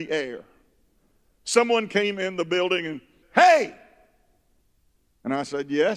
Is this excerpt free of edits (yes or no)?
no